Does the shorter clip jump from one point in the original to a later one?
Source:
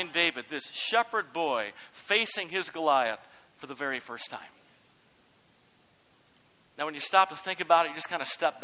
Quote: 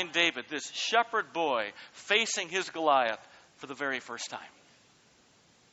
no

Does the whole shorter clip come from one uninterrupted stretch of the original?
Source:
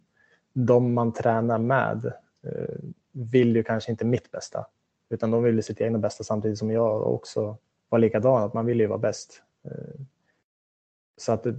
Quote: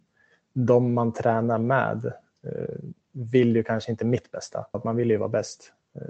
no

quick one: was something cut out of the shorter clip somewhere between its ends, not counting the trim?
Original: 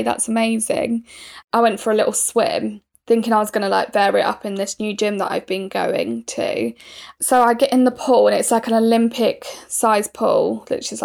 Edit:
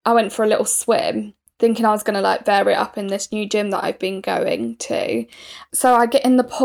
no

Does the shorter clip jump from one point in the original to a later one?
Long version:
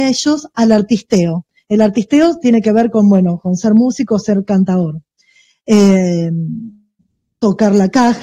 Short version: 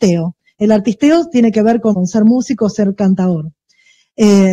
yes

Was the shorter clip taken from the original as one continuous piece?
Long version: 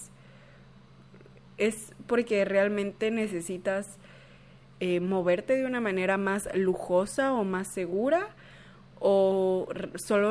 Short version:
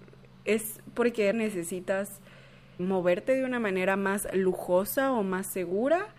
no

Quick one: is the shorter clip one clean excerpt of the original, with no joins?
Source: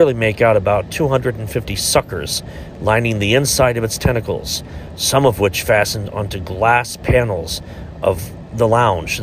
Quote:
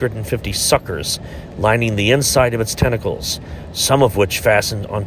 yes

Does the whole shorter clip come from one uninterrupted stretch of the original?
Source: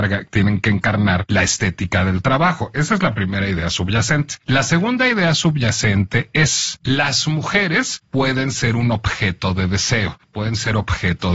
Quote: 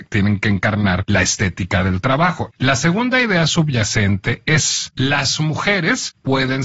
no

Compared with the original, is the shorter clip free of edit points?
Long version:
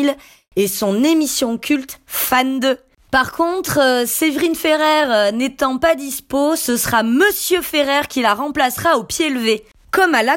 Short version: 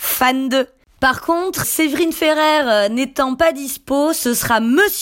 no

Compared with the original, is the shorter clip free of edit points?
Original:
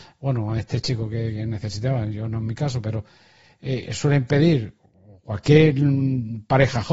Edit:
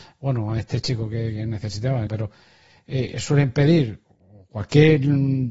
no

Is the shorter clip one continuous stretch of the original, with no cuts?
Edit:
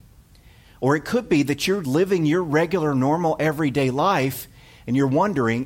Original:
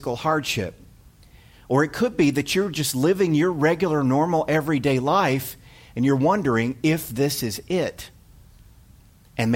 no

